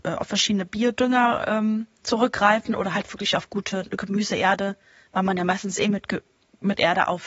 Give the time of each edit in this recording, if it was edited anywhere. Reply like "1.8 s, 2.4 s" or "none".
none